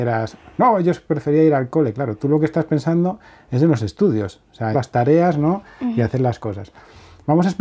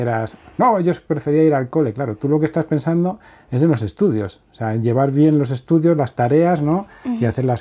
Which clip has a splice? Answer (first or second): first